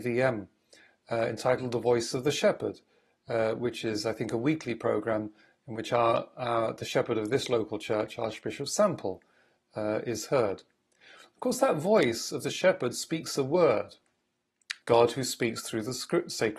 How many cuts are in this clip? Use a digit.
1